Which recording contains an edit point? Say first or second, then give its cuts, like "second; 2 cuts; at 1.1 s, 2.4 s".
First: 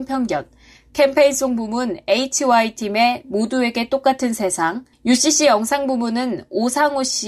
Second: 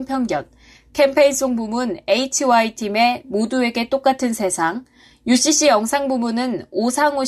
first; 1 cut; at 4.9 s